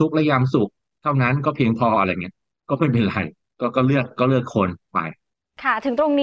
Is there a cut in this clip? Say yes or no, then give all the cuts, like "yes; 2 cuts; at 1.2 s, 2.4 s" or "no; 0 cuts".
no; 0 cuts